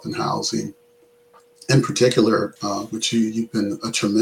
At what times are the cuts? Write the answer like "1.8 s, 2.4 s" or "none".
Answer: 2.6 s